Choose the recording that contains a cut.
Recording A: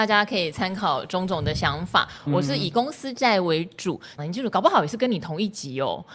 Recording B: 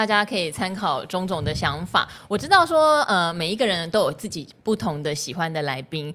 A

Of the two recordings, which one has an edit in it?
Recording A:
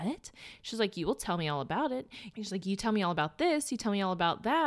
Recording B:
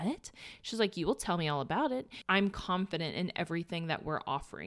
B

